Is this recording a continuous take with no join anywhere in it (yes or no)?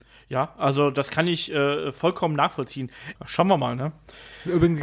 no